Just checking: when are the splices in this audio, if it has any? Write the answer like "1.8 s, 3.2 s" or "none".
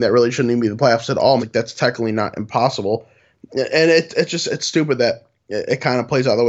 1.4 s